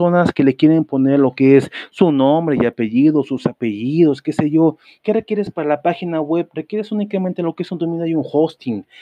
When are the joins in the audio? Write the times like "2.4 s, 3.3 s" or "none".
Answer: 5.0 s